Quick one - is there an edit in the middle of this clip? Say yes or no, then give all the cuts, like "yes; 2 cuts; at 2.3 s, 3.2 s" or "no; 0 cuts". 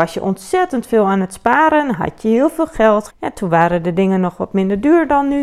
yes; 1 cut; at 3.1 s